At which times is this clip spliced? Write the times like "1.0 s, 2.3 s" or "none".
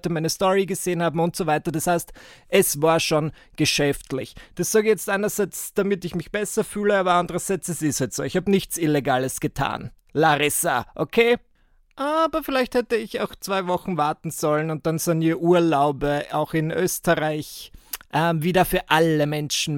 none